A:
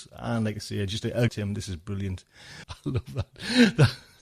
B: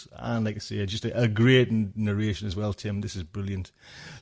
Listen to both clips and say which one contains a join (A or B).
A